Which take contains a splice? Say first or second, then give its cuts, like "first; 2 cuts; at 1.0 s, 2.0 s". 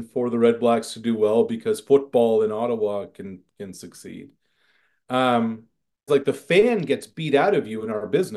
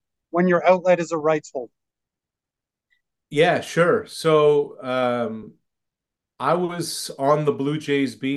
first; 1 cut; at 6.1 s